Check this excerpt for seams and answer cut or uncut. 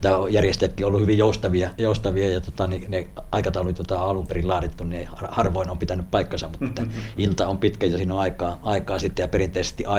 uncut